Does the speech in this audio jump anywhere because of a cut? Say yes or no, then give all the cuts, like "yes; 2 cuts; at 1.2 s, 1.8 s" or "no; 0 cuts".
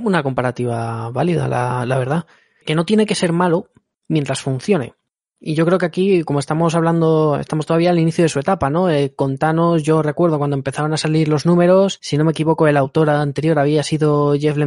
no; 0 cuts